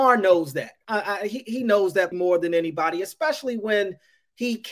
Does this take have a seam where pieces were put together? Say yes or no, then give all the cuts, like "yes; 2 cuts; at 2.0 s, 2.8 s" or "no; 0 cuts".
yes; 1 cut; at 2.1 s